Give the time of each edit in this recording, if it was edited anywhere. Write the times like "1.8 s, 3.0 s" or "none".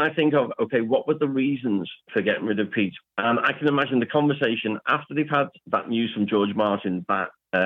none